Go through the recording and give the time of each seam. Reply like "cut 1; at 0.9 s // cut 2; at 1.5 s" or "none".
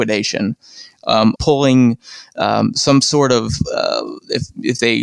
cut 1; at 1.4 s